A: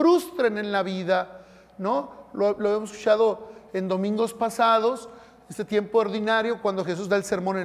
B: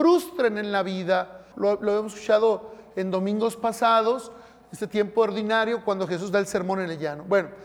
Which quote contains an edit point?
B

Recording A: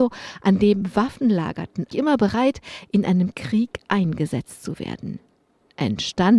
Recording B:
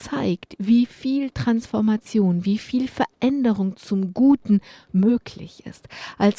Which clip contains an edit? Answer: A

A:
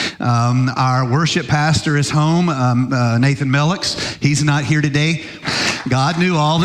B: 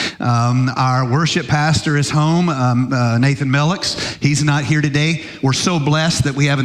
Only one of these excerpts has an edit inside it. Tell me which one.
A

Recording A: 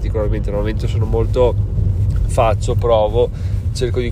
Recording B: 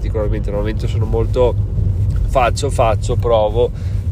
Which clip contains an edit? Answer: A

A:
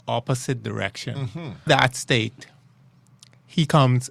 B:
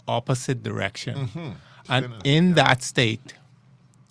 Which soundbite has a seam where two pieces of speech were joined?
A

